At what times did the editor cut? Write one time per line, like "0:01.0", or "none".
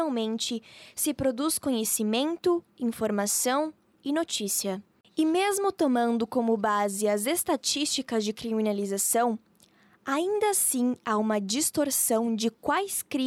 0:05.0